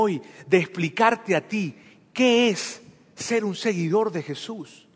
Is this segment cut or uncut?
uncut